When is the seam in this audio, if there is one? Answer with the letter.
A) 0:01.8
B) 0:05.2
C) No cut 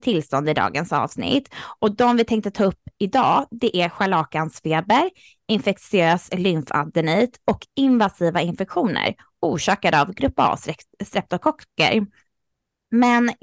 C